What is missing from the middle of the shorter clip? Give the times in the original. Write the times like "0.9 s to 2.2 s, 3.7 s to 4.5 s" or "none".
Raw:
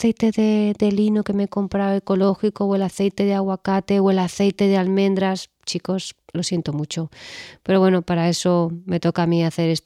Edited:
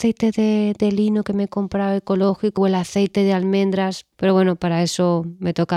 2.6 s to 4.0 s, 5.6 s to 7.6 s